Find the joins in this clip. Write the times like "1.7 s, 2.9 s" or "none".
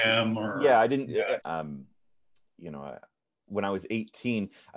1.4 s